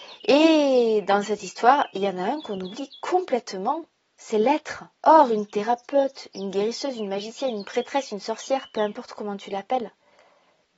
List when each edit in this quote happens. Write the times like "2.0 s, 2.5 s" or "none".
5.0 s